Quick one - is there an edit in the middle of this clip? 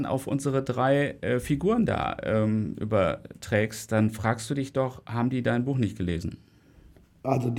no; 0 cuts

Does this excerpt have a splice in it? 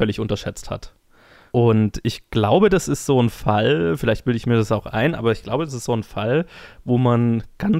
no; 0 cuts

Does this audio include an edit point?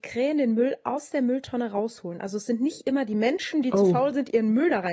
no; 0 cuts

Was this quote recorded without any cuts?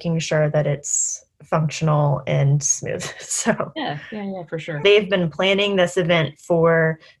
no; 1 cut; at 4.8 s

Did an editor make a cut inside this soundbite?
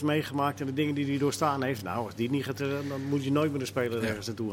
no; 0 cuts

